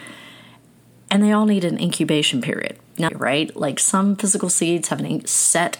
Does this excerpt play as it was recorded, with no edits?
no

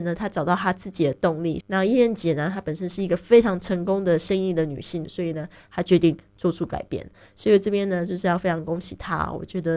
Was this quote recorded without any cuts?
no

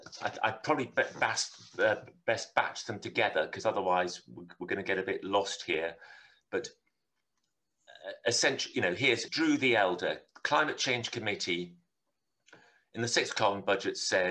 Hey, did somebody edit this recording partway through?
yes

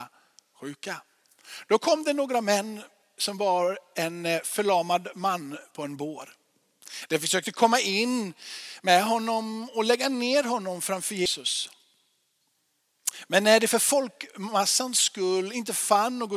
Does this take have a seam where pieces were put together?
no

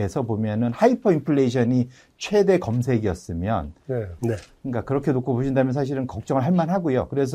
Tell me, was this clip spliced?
yes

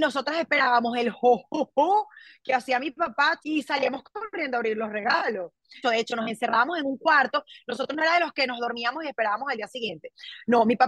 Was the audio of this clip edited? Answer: yes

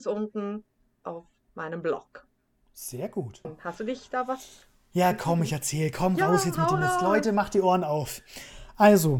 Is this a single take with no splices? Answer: no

